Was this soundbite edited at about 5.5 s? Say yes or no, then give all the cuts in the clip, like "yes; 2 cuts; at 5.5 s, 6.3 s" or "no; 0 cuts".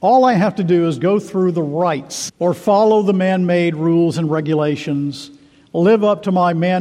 no; 1 cut; at 2.3 s